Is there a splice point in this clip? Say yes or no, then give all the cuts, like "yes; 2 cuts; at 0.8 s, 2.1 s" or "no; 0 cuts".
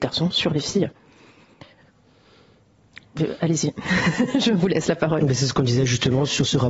no; 0 cuts